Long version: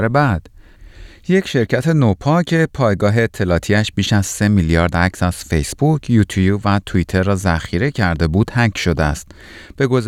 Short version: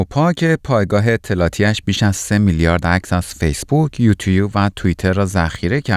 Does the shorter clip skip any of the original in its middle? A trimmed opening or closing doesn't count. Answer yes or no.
no